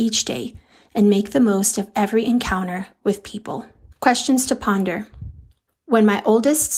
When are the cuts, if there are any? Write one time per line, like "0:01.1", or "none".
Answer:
0:03.9
0:05.7

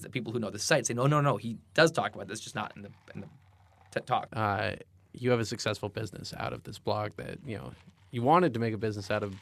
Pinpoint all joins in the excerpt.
0:04.3

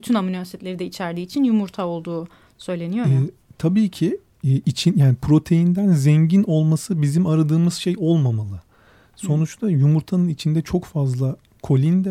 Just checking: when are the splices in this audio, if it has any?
none

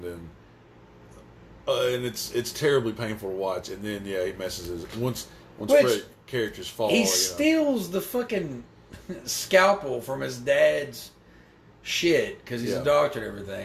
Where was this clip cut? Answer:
none

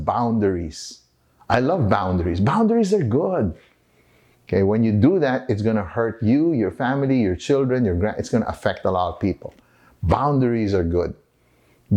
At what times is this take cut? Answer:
0:04.3

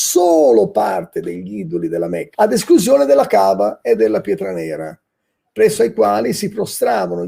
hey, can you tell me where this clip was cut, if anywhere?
0:02.3

